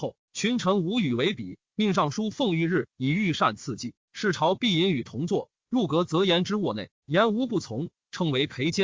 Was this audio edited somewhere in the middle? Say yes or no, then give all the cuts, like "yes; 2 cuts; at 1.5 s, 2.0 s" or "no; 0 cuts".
yes; 1 cut; at 1.6 s